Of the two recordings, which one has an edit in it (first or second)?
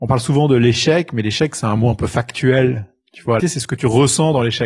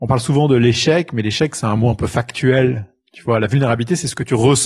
first